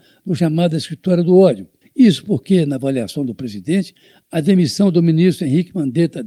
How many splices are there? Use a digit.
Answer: 1